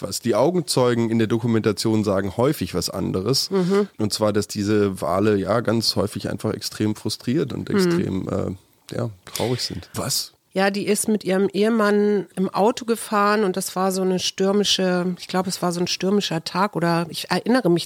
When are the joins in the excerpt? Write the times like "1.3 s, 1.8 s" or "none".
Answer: 9.9 s